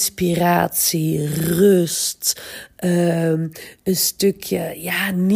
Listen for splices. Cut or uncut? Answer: uncut